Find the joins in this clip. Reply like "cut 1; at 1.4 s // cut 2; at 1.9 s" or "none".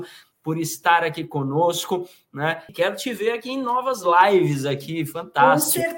cut 1; at 2.7 s